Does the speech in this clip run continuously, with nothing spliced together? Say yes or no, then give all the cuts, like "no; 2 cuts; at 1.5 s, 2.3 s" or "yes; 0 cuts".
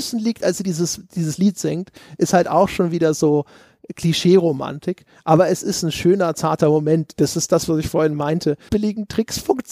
no; 1 cut; at 8.7 s